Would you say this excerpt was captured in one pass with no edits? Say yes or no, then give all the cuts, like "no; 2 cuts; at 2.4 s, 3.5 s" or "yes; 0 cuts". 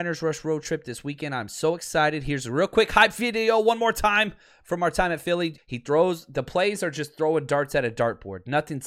no; 1 cut; at 5.6 s